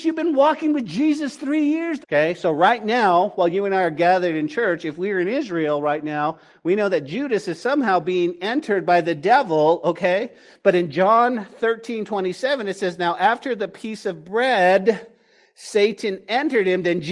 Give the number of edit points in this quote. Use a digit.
1